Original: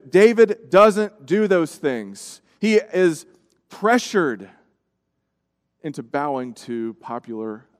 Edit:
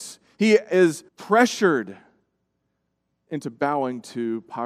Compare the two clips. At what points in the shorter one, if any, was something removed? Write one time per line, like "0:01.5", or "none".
0:01.1